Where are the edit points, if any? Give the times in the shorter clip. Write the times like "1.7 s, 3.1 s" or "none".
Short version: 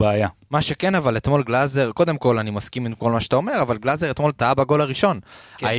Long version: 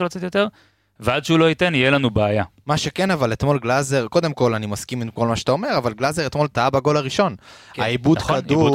none